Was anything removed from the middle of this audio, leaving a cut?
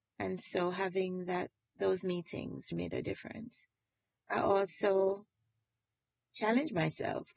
yes; 1 cut; at 2.7 s

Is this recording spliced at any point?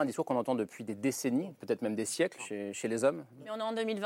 yes; 1 cut; at 2.4 s

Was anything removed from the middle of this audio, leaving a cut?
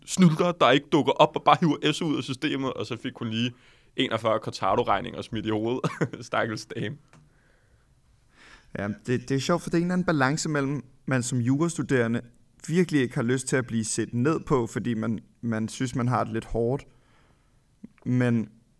no; 0 cuts

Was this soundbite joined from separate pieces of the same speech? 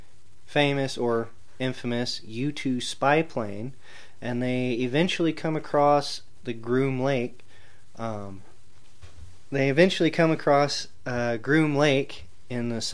no; 0 cuts

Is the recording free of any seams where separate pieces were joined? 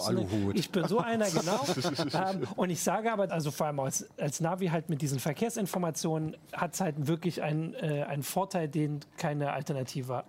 no; 1 cut; at 3.3 s

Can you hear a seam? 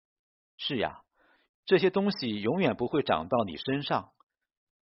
yes; 1 cut; at 1.5 s

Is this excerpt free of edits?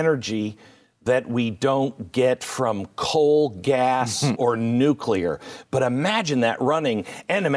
no; 1 cut; at 4.3 s

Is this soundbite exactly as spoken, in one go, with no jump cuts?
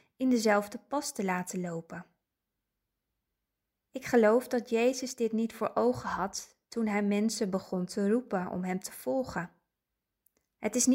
no; 1 cut; at 3.8 s

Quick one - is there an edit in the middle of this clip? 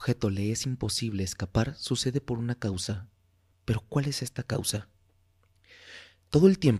no; 0 cuts

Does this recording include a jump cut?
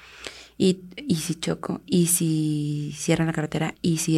no; 0 cuts

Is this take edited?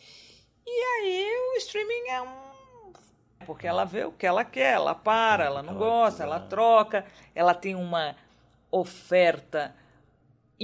yes; 1 cut; at 3.4 s

